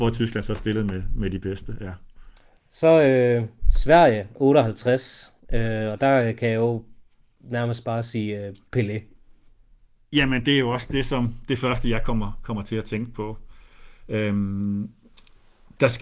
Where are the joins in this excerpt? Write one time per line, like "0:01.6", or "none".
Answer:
none